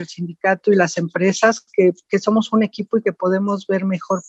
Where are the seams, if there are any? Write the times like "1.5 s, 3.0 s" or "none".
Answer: none